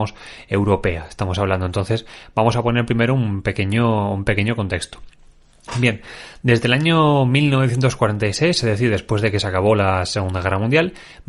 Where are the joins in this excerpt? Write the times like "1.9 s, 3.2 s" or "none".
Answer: none